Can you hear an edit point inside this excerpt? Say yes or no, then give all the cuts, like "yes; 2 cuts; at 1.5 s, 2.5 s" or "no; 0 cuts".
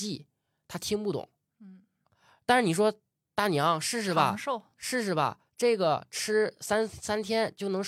no; 0 cuts